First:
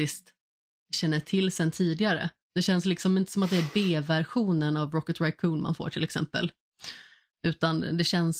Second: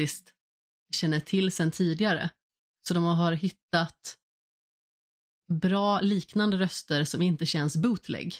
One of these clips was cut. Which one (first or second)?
first